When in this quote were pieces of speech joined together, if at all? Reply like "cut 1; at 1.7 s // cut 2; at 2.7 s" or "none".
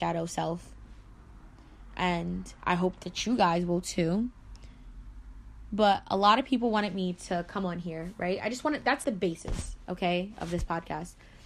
cut 1; at 9.0 s